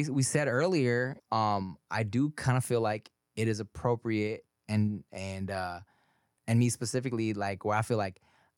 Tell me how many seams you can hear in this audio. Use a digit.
2